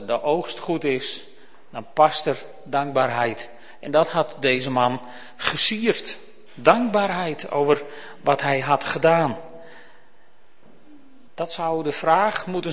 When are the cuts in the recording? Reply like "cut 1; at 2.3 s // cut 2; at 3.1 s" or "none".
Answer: cut 1; at 11.3 s